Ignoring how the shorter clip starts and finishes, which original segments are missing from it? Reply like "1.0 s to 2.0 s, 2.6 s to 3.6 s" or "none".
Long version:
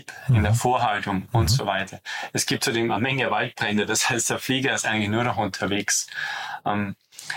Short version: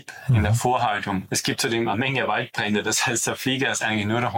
1.3 s to 2.3 s